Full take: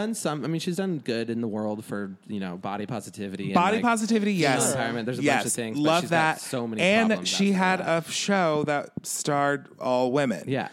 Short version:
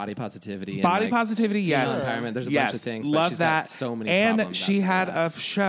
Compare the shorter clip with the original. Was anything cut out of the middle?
no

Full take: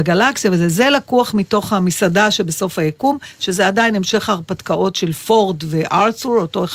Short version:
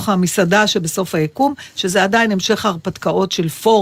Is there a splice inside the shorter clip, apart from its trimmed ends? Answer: no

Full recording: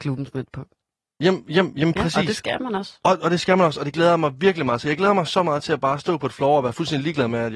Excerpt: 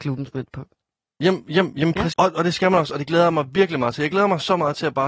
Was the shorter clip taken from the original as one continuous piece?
no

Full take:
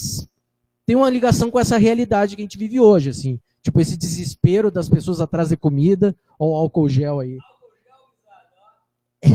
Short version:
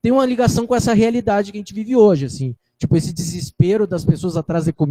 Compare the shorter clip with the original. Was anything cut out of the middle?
no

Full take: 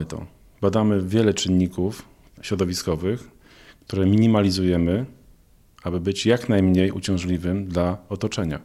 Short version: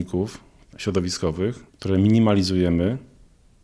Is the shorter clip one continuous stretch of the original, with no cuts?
no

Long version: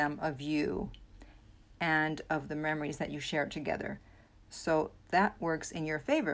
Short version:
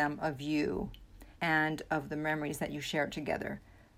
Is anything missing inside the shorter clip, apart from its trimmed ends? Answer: yes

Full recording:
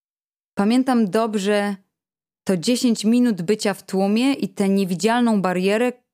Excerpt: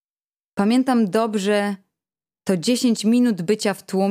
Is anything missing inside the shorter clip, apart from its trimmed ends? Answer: no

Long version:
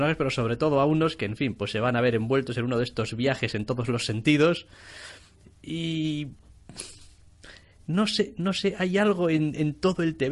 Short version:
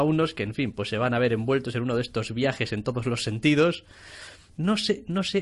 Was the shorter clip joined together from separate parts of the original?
yes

